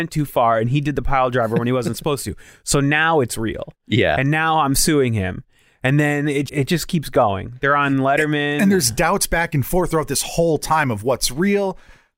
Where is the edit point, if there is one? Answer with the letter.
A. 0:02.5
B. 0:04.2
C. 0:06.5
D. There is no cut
C